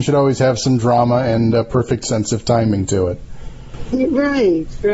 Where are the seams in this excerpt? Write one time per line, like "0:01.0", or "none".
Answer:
none

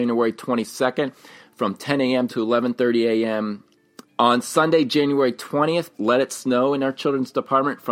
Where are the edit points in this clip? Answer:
0:02.3
0:04.0
0:05.9

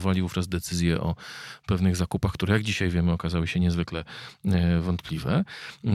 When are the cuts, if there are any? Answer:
none

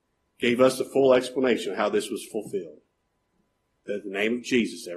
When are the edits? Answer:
0:03.8

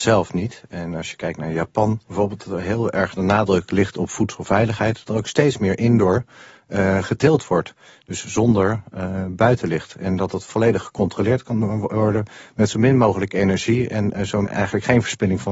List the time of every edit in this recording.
0:02.0
0:14.4

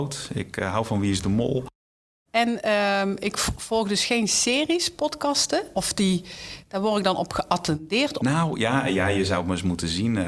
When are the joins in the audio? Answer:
0:02.3
0:05.7
0:08.2

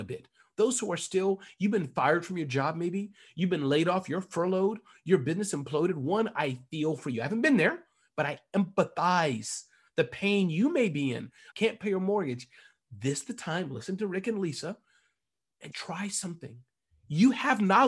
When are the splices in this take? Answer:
0:11.5
0:15.7

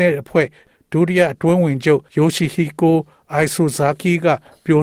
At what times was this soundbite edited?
0:02.1

